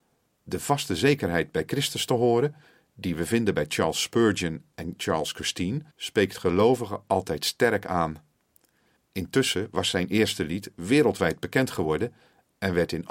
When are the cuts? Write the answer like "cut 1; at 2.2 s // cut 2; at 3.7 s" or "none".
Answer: cut 1; at 5.9 s // cut 2; at 9.0 s